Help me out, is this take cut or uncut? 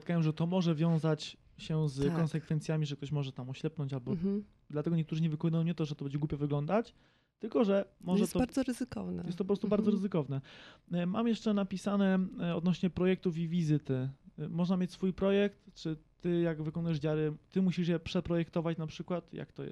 uncut